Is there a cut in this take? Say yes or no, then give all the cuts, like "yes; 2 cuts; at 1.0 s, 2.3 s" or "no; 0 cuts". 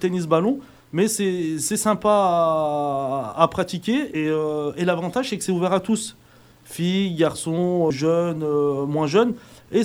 yes; 1 cut; at 7.9 s